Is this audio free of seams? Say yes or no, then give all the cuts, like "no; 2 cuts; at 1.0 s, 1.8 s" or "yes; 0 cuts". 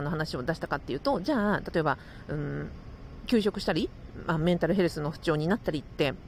yes; 0 cuts